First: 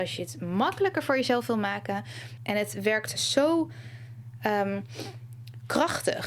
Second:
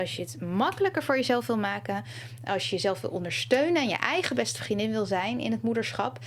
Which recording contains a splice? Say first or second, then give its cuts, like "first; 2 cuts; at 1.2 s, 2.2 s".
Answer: first; 1 cut; at 2.4 s